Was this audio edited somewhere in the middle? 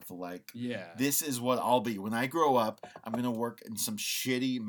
no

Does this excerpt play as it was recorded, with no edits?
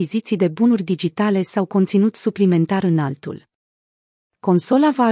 yes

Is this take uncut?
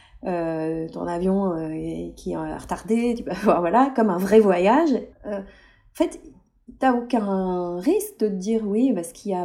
no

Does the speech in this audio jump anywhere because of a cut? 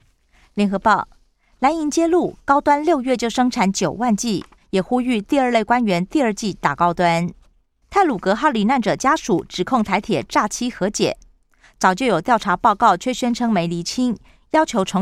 yes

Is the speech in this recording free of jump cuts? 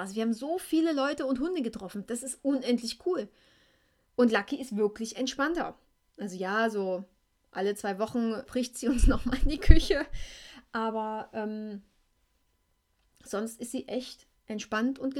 no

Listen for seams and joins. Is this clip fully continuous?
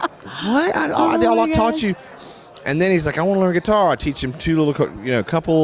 yes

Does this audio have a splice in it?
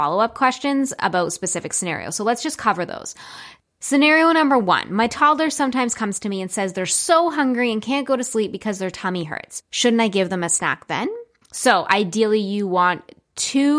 yes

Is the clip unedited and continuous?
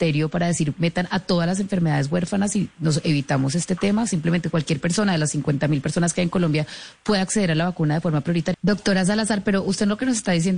no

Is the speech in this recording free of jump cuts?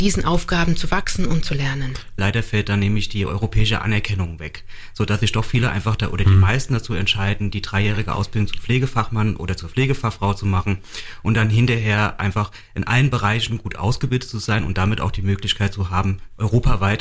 no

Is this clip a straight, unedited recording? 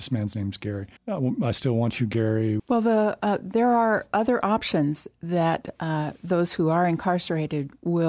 no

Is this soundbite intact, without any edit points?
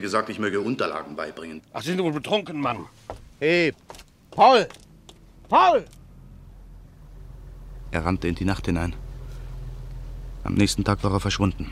no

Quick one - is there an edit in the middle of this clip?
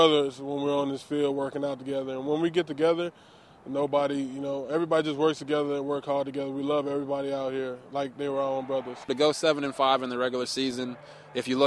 yes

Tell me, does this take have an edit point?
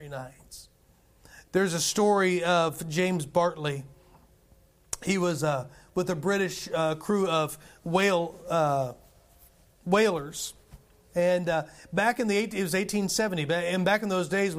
no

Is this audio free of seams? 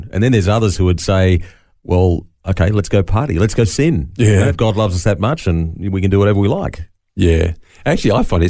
yes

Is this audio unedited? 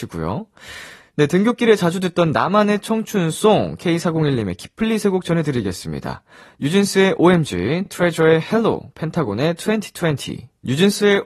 yes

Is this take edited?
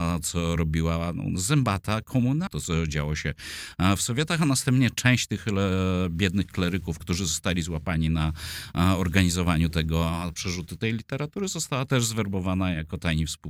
yes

